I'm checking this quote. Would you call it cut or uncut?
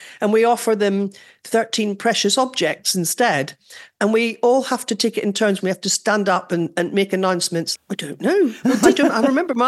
cut